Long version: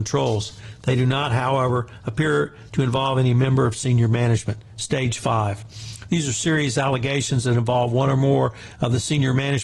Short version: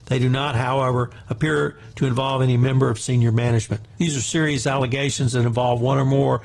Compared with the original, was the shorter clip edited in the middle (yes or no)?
yes